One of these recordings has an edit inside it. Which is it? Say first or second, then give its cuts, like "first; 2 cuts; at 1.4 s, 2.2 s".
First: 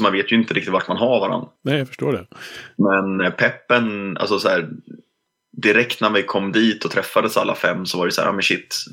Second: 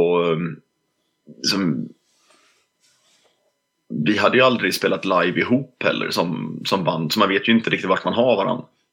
first; 1 cut; at 1.6 s